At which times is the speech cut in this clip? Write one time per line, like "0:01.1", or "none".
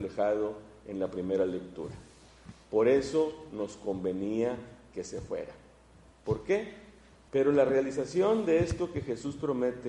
0:07.3